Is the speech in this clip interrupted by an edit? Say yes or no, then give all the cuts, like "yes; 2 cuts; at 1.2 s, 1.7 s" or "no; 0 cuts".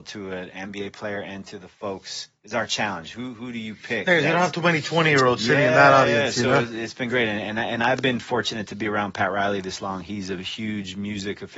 no; 0 cuts